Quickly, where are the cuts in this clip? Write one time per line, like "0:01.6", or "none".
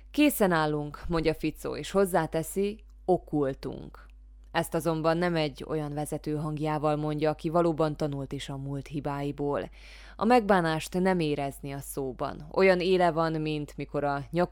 none